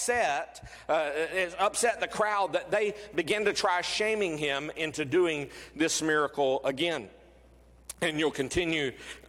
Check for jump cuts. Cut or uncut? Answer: uncut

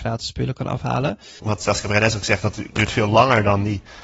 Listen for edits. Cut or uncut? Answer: cut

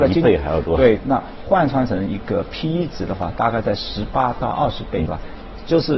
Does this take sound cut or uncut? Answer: cut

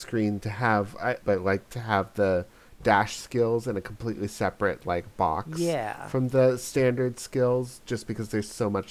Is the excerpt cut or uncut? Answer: cut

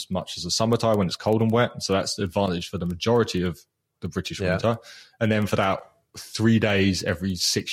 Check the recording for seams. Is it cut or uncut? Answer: uncut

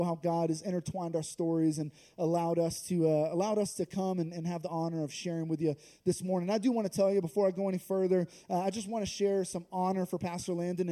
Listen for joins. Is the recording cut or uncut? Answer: uncut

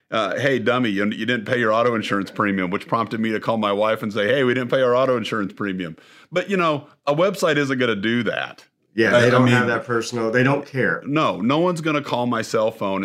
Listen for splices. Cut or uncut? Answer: uncut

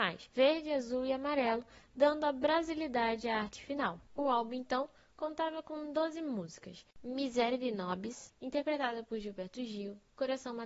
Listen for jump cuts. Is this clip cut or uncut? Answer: uncut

